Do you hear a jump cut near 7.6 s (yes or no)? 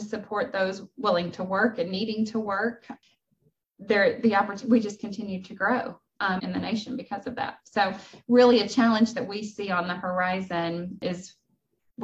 no